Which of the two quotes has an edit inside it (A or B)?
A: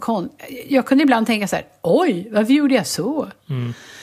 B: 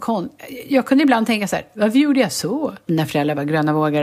B